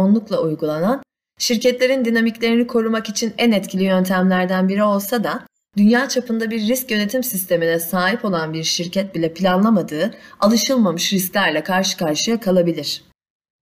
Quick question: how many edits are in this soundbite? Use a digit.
0